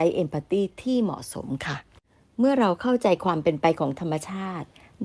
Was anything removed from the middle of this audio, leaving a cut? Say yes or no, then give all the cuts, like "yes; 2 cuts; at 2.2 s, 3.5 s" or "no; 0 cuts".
no; 0 cuts